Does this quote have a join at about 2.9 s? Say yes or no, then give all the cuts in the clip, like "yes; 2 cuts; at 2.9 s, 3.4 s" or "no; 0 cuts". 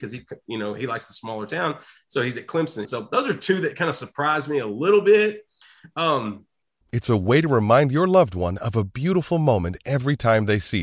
yes; 2 cuts; at 2.9 s, 6.8 s